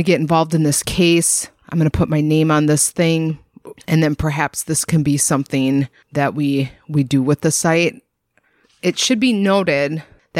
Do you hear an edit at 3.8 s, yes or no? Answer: yes